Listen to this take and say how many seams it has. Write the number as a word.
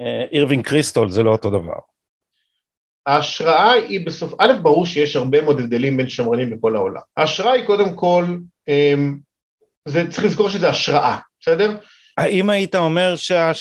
two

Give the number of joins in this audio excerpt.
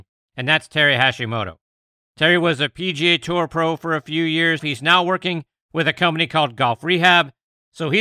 one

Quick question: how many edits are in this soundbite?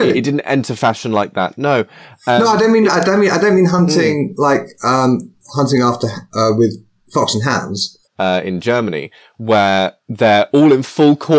two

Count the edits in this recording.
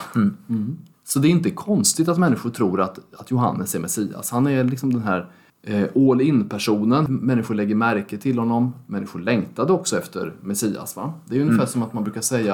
one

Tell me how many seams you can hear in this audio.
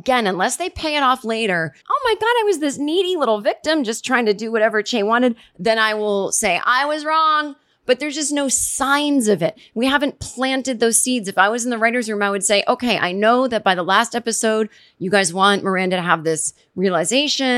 one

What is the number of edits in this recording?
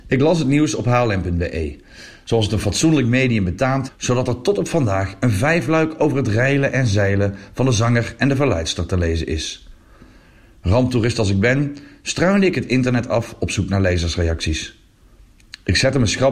one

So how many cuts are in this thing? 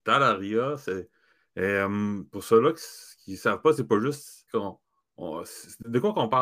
one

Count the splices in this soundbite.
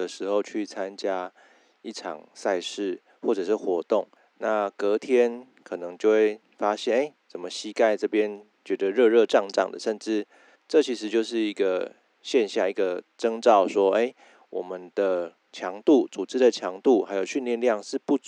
one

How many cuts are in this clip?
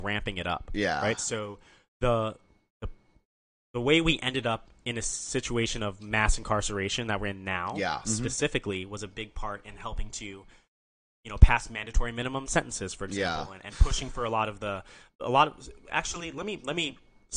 one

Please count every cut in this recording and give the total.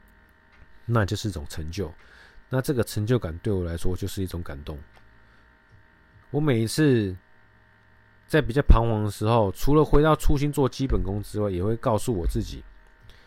one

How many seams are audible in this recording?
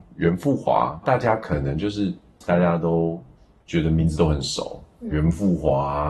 three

